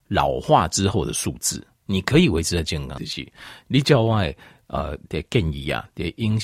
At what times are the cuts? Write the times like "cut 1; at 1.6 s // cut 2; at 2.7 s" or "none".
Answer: cut 1; at 1.8 s // cut 2; at 3.0 s